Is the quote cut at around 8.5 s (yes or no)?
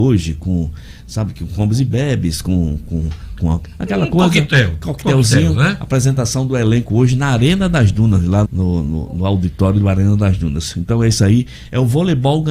yes